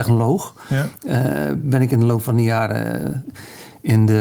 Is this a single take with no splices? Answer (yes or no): yes